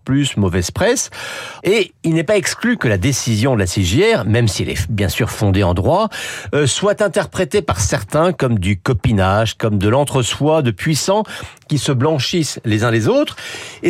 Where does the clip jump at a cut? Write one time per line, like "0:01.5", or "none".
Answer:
0:01.6